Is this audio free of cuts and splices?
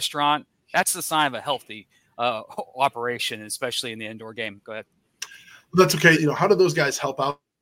no; 2 cuts; at 4.6 s, 6.1 s

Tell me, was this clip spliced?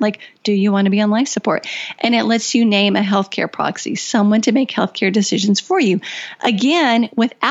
no; 0 cuts

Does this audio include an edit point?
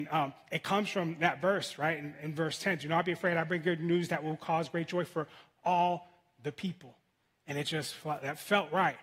no; 0 cuts

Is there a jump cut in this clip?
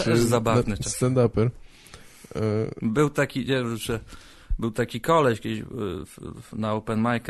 no; 0 cuts

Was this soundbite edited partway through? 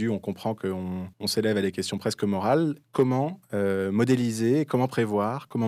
yes; 1 cut; at 1.1 s

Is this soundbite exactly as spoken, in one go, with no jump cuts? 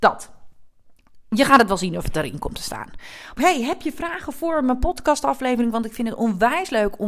no; 1 cut; at 3.4 s

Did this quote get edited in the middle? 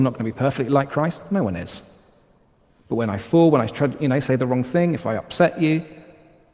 no; 0 cuts

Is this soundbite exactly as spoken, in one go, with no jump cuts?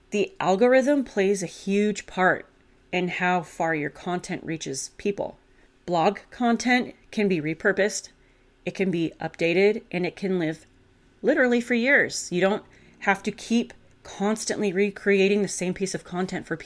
yes; 0 cuts

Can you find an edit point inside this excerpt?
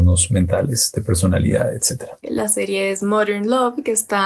yes; 1 cut; at 2.2 s

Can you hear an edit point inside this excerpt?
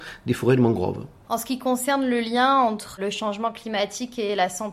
no; 0 cuts

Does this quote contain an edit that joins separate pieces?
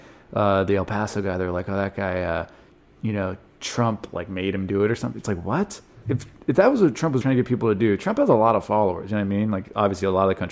yes; 2 cuts; at 6.0 s, 7.2 s

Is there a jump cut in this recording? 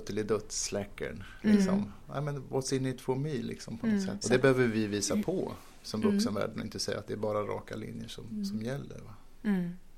yes; 2 cuts; at 4.2 s, 7.1 s

